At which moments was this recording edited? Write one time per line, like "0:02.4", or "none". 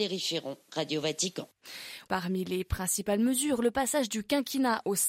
0:02.1